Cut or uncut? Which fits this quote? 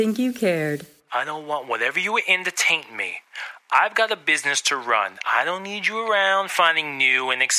cut